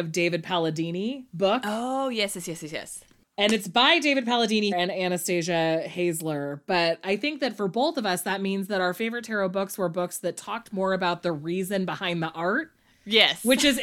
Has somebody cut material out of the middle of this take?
yes; 1 cut; at 4.7 s

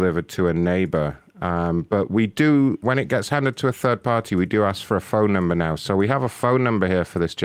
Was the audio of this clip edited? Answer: yes; 1 cut; at 2.8 s

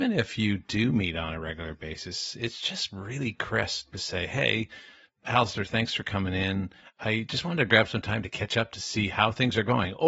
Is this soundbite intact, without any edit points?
yes; 0 cuts

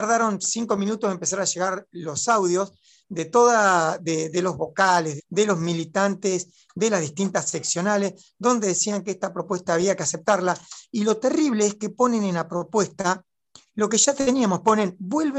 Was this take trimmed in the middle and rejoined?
yes; 1 cut; at 5.2 s

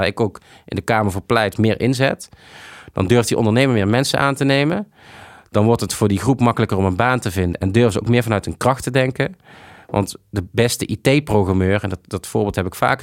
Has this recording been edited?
no; 0 cuts

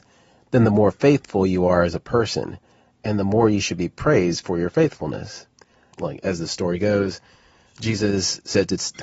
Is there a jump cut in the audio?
yes; 1 cut; at 5.9 s

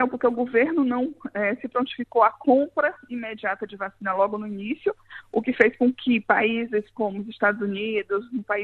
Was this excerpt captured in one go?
yes; 0 cuts

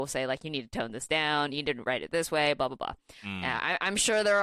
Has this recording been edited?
no; 0 cuts

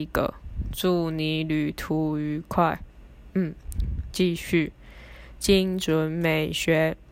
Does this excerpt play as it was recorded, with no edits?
yes; 0 cuts

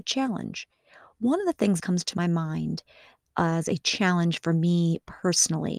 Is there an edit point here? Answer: yes; 1 cut; at 1.8 s

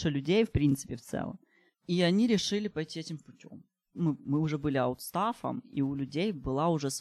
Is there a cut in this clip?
yes; 1 cut; at 3.9 s

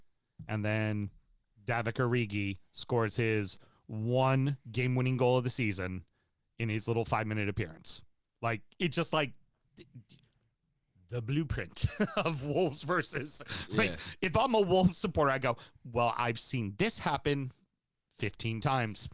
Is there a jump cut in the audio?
no; 0 cuts

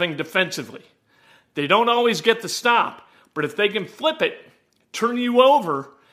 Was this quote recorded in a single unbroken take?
yes; 0 cuts

